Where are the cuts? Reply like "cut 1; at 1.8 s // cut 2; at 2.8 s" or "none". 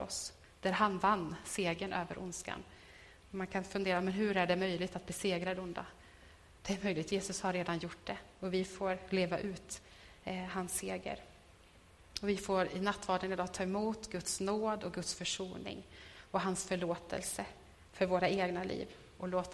none